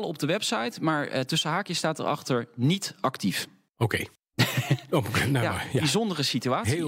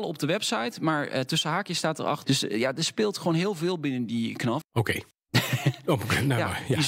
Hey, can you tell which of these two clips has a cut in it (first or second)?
second